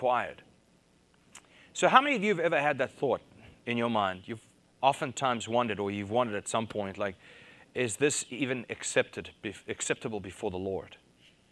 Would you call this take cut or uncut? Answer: uncut